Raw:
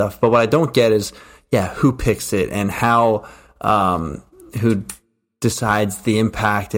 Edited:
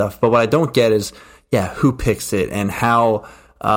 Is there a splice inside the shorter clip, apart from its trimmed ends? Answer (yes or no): no